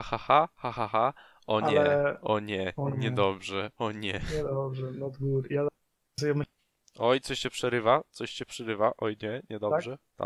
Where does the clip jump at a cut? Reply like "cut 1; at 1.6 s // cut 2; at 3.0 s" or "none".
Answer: none